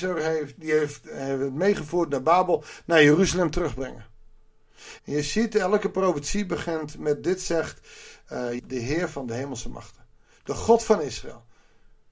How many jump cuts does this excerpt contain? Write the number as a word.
two